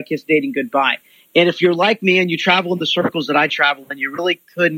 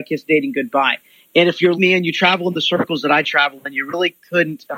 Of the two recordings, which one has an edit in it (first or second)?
second